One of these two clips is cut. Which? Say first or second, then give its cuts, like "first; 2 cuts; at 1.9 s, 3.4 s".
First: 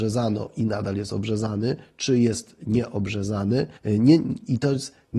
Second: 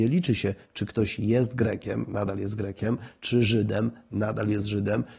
first; 1 cut; at 3.8 s